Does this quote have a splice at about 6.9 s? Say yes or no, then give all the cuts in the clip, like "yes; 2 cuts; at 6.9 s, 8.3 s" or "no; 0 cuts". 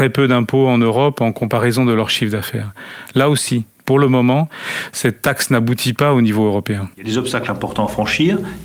yes; 1 cut; at 6.9 s